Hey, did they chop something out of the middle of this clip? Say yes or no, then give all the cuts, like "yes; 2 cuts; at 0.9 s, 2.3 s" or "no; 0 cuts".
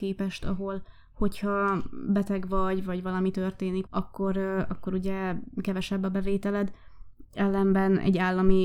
yes; 1 cut; at 3.9 s